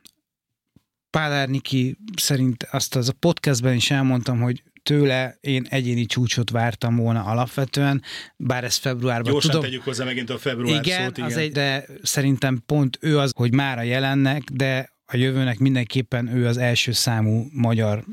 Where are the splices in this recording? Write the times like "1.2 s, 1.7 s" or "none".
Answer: 11.5 s, 13.3 s